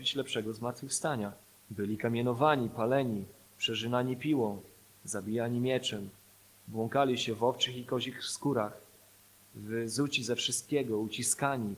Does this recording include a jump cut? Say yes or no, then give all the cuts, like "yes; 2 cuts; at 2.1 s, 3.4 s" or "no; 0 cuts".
yes; 1 cut; at 1.6 s